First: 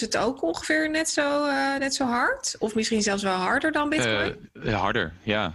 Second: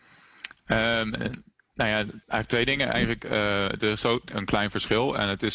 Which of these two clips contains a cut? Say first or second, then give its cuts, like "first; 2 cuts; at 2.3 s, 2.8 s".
second; 2 cuts; at 2.2 s, 4.3 s